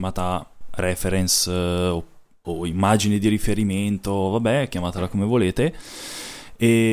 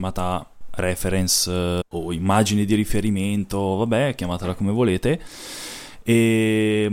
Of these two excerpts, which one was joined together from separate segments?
second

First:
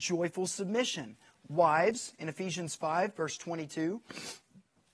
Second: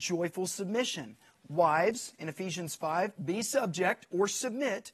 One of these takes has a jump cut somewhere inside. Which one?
second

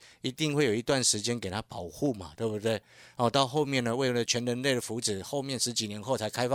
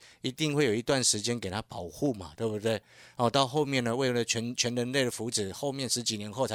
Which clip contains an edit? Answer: first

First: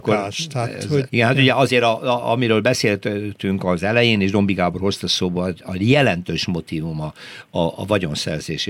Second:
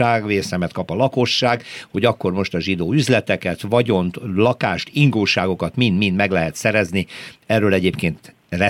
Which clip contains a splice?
first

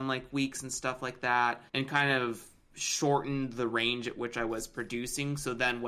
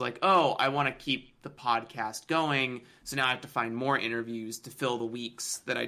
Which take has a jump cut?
first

